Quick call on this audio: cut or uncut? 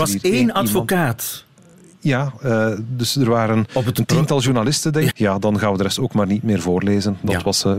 cut